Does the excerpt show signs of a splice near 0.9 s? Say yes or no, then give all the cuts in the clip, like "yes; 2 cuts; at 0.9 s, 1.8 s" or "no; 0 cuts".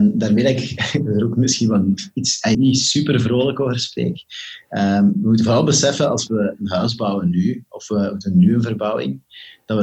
no; 1 cut; at 2.5 s